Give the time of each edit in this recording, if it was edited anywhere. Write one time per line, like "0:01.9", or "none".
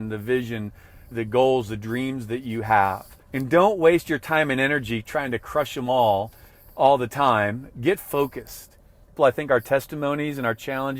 0:01.1
0:03.2
0:09.2